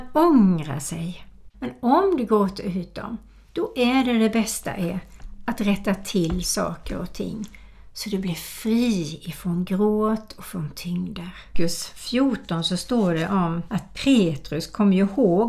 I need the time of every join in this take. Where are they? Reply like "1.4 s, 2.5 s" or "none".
1.5 s, 11.5 s, 13.7 s